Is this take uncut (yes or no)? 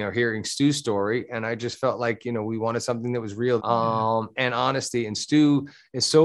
no